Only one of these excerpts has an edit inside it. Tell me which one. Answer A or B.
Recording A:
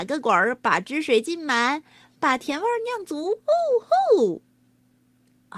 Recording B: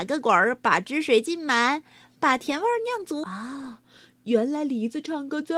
B